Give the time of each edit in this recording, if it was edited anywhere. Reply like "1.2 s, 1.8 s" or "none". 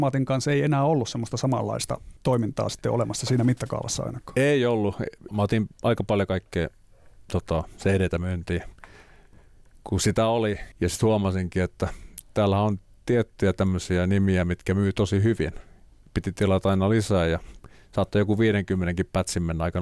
2.2 s, 5.3 s, 10.7 s